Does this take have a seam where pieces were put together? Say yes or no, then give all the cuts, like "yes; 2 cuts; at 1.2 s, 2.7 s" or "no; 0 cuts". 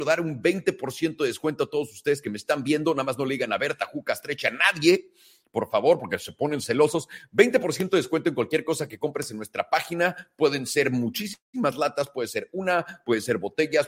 no; 0 cuts